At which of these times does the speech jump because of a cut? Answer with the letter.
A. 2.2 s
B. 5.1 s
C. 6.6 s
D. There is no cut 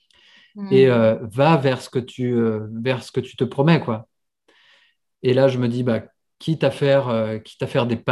D